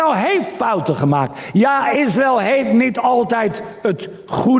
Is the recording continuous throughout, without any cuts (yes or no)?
yes